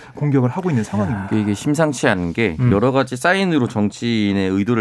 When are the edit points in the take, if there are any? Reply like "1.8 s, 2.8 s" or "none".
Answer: none